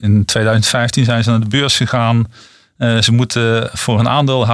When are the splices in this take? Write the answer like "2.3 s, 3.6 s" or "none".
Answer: none